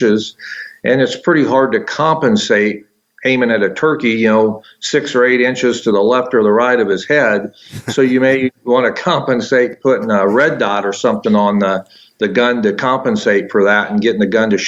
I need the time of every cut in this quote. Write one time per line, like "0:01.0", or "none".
none